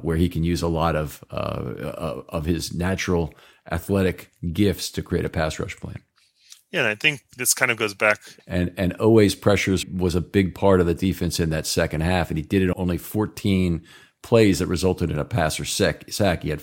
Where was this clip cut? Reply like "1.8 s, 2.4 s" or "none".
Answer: 8.4 s, 9.8 s, 12.7 s